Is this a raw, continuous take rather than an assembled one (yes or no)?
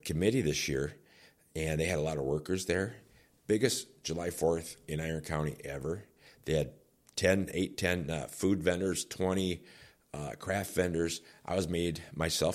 yes